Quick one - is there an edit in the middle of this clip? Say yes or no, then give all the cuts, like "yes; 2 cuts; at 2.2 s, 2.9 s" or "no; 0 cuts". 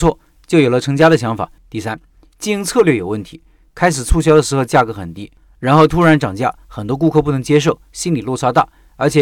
yes; 1 cut; at 1.6 s